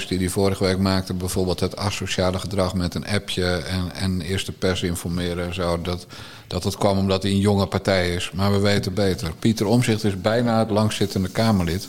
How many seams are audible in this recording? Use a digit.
0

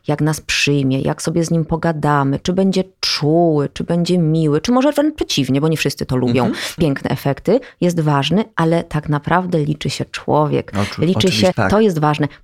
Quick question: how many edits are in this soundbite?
2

